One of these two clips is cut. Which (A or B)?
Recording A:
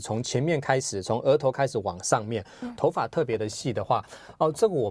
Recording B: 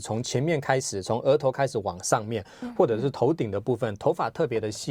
A